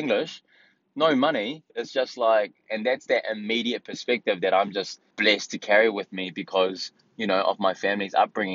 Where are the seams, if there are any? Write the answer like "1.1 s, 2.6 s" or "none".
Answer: 1.7 s, 5.1 s